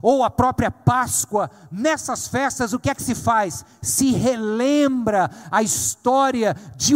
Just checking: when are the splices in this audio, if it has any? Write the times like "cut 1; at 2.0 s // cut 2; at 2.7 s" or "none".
none